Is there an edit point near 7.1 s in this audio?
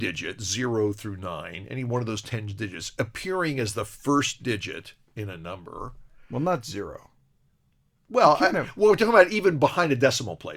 no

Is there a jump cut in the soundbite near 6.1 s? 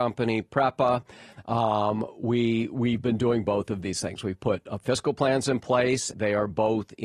yes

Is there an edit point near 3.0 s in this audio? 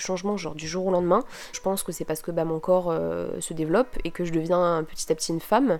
no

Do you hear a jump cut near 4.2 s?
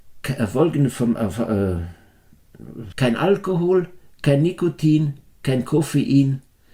no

